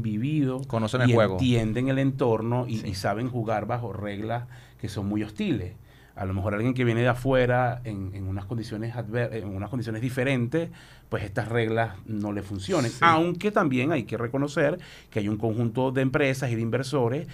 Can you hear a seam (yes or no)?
no